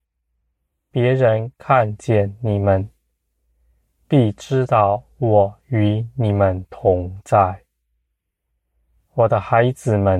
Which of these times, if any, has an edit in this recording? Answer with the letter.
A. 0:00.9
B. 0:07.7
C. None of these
A